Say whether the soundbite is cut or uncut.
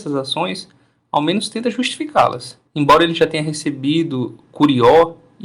cut